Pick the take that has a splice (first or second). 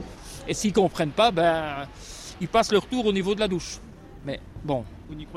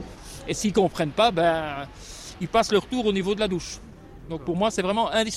first